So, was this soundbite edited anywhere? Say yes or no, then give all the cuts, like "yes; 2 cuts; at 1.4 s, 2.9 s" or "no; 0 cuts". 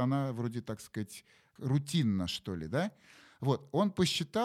no; 0 cuts